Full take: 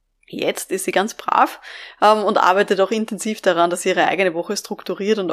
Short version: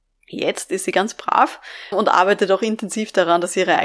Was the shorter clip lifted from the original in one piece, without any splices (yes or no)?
no